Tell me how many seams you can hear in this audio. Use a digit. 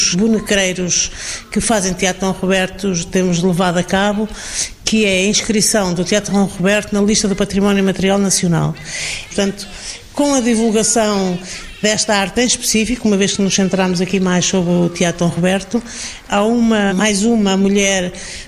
2